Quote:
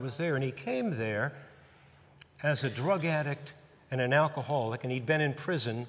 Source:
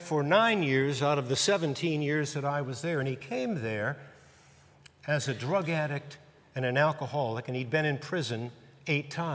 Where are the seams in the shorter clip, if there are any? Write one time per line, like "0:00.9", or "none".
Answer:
none